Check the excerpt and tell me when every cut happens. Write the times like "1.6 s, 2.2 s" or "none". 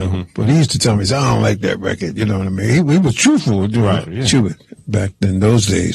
4.1 s